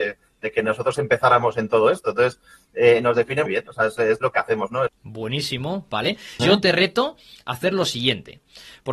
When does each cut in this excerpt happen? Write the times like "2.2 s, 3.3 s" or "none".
3.5 s, 4.9 s, 6.4 s